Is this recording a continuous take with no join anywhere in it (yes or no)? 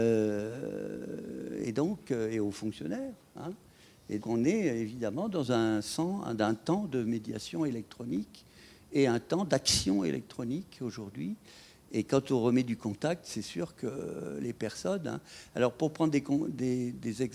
no